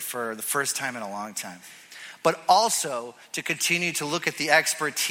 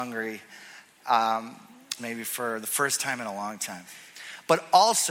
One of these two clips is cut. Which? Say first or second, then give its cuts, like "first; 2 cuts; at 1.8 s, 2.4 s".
second; 1 cut; at 2.0 s